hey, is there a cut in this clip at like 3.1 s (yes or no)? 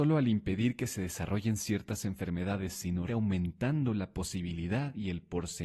yes